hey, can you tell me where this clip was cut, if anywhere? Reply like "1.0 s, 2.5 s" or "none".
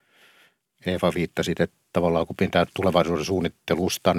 none

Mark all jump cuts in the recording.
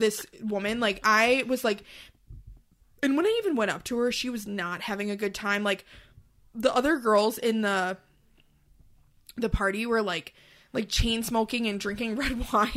none

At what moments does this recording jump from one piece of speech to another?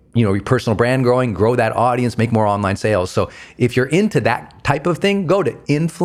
none

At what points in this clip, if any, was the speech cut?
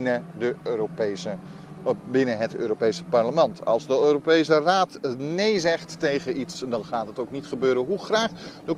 none

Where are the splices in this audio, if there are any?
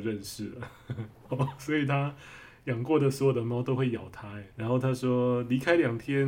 1.3 s, 4.5 s

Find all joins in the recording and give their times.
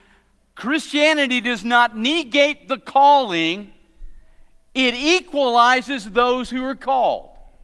none

